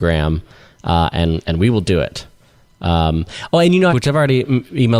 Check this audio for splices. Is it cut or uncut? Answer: cut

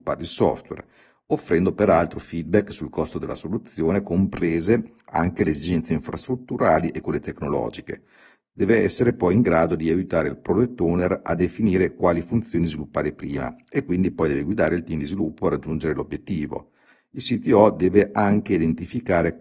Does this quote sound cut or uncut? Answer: uncut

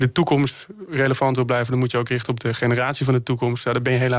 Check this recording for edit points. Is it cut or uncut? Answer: uncut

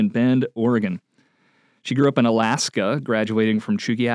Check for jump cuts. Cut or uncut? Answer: uncut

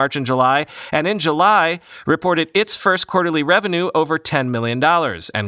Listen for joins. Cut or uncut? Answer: uncut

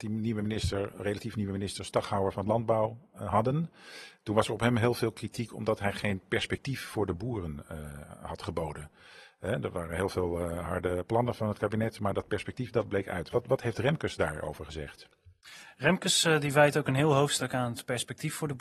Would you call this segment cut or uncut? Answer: uncut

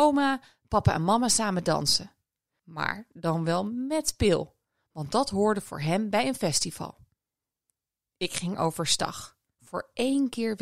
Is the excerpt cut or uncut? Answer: uncut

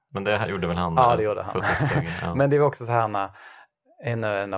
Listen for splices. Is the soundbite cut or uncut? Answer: uncut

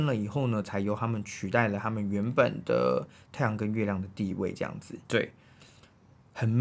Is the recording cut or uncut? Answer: cut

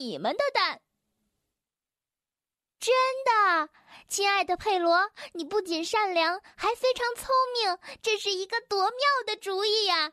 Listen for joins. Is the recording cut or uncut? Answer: uncut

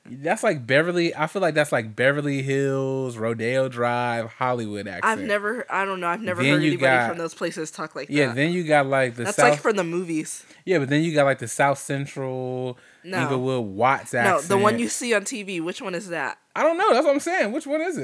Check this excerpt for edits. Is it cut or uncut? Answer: uncut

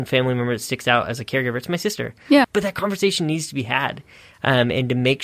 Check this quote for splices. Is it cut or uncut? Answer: cut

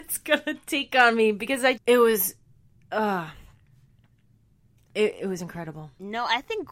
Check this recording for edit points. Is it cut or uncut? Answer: cut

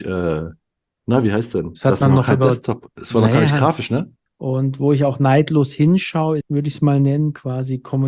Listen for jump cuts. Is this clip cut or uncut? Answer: cut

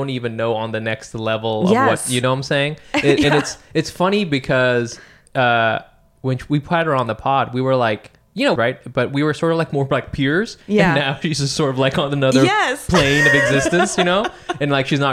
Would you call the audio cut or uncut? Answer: cut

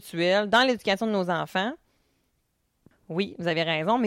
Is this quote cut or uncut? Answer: cut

